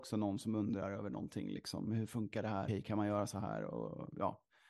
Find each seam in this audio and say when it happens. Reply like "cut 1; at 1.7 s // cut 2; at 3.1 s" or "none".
cut 1; at 2.7 s